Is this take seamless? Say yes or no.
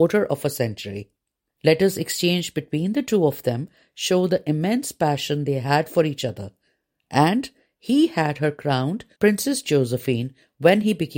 no